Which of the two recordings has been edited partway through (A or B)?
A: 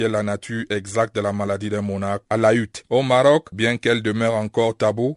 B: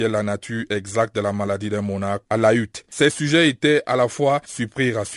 A